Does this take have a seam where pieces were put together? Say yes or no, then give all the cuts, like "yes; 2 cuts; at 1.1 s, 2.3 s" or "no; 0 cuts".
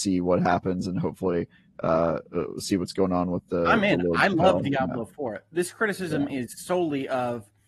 no; 0 cuts